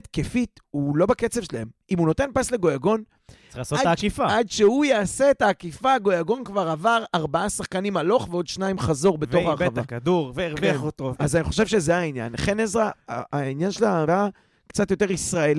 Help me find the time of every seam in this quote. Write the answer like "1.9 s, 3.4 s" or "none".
11.1 s, 14.0 s